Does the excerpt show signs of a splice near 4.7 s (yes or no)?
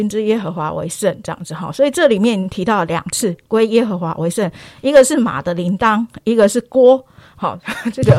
no